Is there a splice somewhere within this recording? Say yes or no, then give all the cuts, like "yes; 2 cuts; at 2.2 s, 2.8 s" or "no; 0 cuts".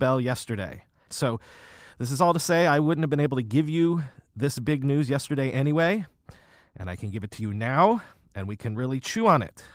yes; 1 cut; at 1.1 s